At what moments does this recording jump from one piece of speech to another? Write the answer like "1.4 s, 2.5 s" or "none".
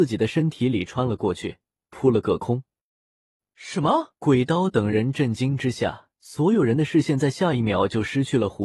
4.2 s, 6.1 s

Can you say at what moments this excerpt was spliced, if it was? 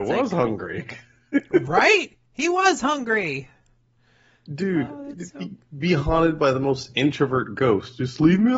none

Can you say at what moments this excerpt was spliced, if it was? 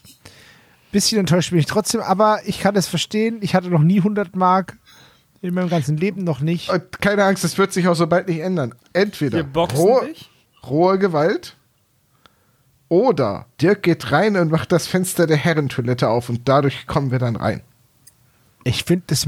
8.8 s, 13.5 s

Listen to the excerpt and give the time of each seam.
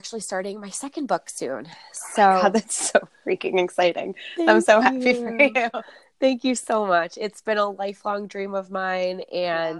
none

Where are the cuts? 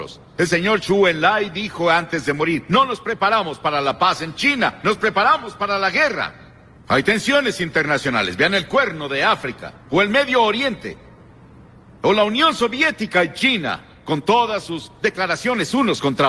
6.8 s, 9.8 s

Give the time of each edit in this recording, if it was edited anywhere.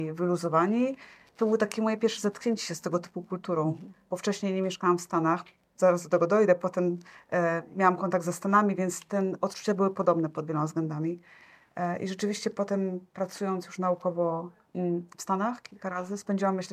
none

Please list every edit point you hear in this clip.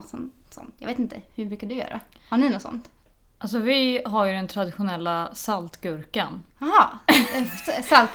6.5 s

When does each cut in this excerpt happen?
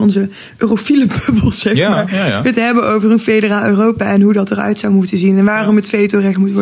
none

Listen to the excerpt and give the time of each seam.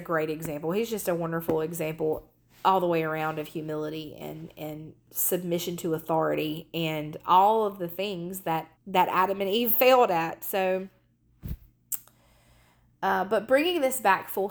8.7 s

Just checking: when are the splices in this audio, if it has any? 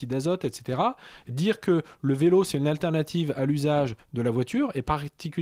1.3 s

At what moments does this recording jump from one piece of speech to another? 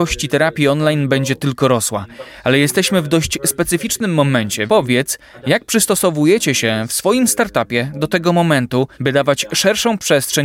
4.7 s, 8.9 s

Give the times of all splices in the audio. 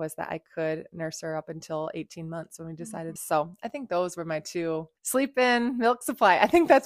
3.2 s, 5.0 s

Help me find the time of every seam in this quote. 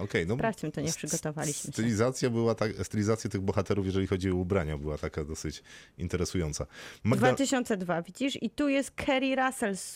none

